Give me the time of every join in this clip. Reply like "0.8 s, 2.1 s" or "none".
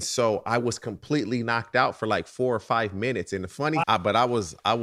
3.8 s